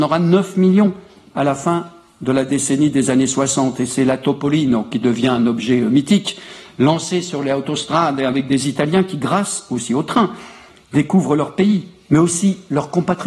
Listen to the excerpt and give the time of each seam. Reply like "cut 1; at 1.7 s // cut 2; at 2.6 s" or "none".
none